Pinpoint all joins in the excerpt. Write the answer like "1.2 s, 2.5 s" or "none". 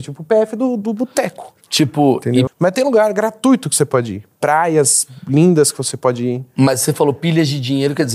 2.5 s